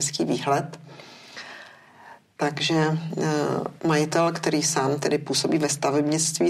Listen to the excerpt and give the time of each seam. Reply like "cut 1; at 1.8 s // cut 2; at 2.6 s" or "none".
cut 1; at 3.8 s